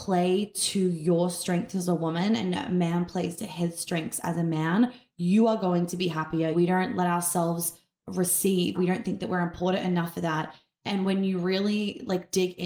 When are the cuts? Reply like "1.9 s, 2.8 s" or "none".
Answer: 6.5 s, 8.7 s